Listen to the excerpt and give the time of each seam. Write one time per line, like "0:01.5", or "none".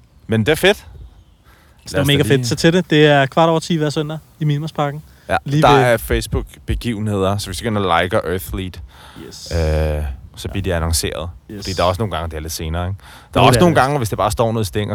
0:06.0
0:10.3